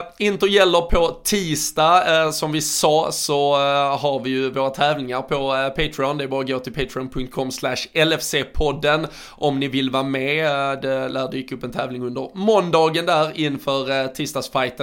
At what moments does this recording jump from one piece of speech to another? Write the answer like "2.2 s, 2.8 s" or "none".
none

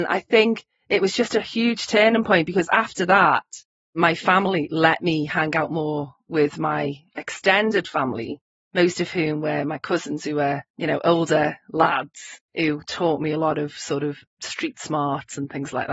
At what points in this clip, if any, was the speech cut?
10.7 s, 12.5 s

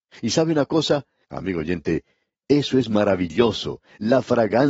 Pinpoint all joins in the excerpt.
1.2 s

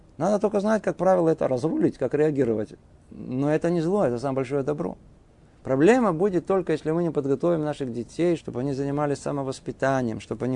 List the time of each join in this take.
5.6 s, 8.4 s

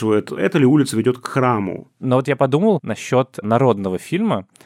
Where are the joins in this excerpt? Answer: 2.0 s

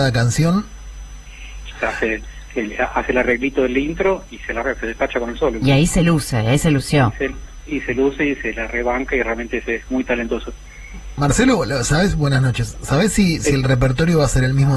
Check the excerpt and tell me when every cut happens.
1.7 s

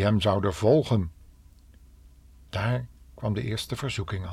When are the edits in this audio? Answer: none

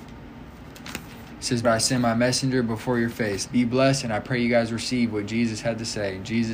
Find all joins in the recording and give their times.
1.6 s, 3.4 s

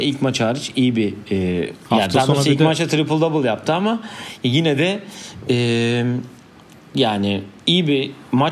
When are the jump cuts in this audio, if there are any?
7.6 s

